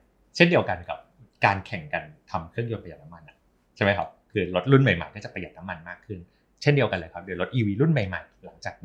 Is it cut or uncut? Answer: uncut